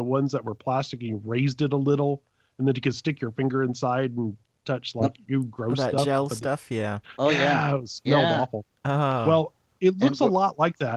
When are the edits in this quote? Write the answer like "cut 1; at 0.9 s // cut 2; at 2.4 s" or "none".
none